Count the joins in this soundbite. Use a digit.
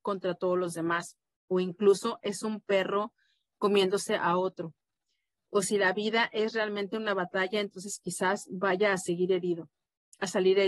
0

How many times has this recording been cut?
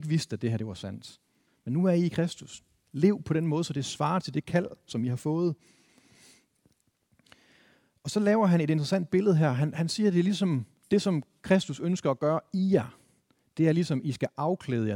1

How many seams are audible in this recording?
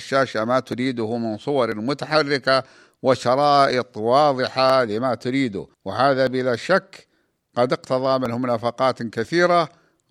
1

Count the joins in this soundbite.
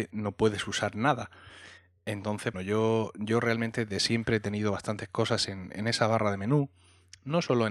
1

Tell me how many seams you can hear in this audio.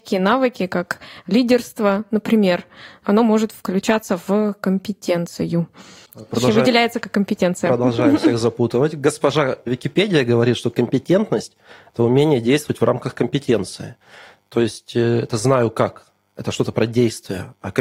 0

